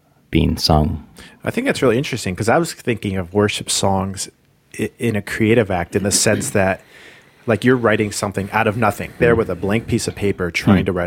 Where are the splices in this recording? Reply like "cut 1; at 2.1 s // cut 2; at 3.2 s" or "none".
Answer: cut 1; at 9.2 s